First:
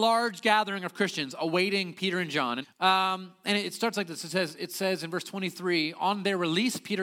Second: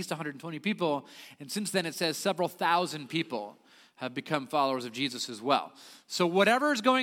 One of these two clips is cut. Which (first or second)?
first